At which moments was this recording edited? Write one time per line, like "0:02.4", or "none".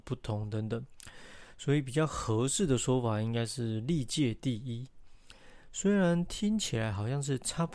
none